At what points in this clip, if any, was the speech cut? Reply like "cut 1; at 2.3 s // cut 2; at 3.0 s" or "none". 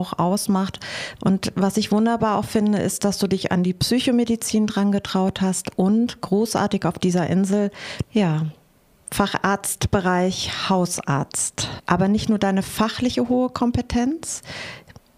cut 1; at 1.2 s // cut 2; at 8.0 s // cut 3; at 11.8 s